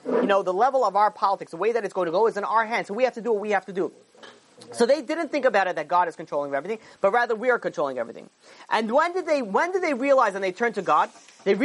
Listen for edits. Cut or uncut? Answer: uncut